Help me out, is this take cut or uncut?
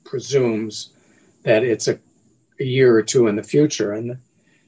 uncut